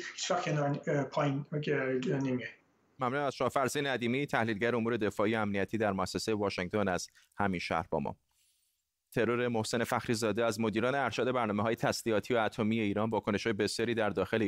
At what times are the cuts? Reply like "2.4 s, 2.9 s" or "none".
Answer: none